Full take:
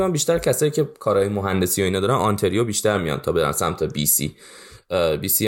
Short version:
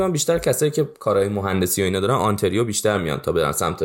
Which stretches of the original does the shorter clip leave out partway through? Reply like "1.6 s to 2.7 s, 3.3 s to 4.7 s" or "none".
none